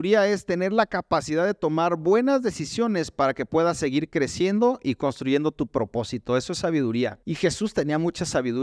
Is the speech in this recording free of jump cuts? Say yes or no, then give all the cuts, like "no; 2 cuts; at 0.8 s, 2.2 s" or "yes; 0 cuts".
no; 1 cut; at 7.2 s